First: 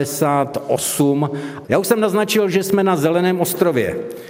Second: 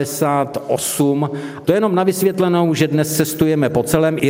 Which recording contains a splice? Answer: first; 1 cut; at 1.7 s

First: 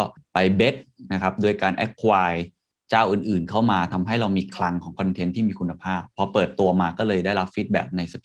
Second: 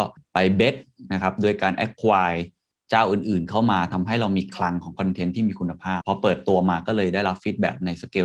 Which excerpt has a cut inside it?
second; 1 cut; at 6.0 s

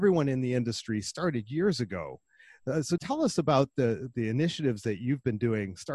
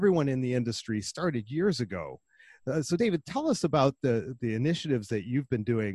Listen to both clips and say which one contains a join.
first; 1 cut; at 3.0 s

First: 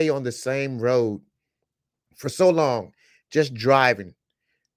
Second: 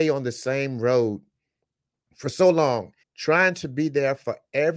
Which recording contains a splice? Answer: second; 1 cut; at 3.0 s

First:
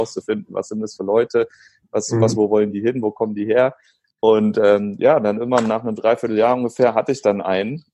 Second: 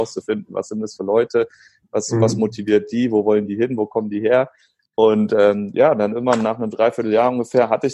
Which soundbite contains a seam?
first; 1 cut; at 2.3 s

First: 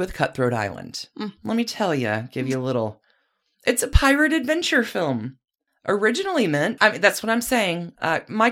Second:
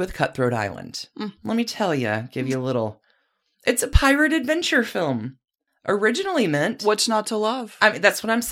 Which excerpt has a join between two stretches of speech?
first; 1 cut; at 6.8 s

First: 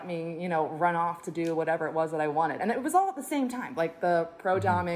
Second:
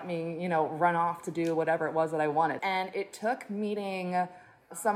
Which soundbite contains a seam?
second; 1 cut; at 2.6 s

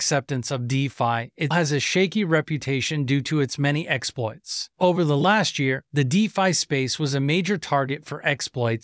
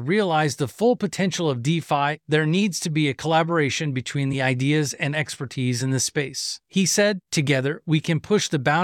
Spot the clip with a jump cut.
first; 1 cut; at 1.5 s

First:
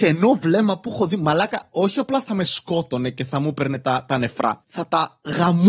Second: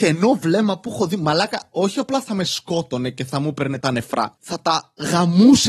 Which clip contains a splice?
second; 1 cut; at 3.8 s

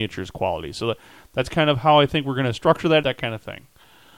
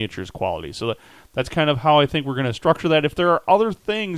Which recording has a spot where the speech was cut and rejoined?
first; 1 cut; at 3.0 s

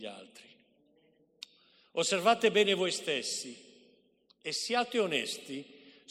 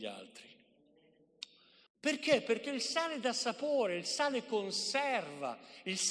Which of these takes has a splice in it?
second; 1 cut; at 1.9 s

